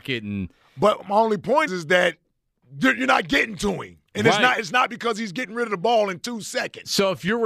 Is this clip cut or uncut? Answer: cut